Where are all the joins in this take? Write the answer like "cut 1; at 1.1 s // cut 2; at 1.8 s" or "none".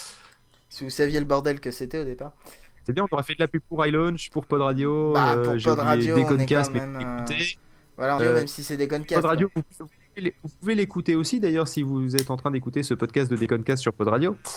cut 1; at 8.2 s // cut 2; at 9.8 s